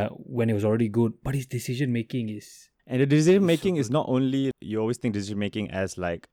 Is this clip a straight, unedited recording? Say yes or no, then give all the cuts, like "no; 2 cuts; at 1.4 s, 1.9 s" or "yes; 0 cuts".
no; 2 cuts; at 2.8 s, 4.5 s